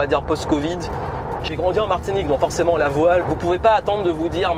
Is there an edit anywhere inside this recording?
yes; 2 cuts; at 1.4 s, 3.2 s

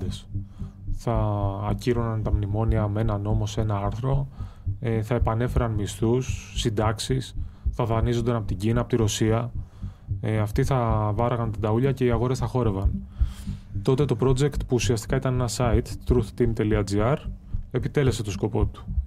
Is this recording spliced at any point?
no; 0 cuts

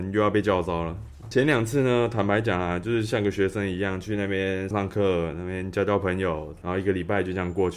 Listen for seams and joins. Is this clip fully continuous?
no; 3 cuts; at 1.2 s, 4.7 s, 6.6 s

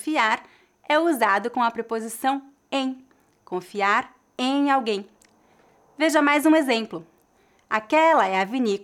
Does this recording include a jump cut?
no; 0 cuts

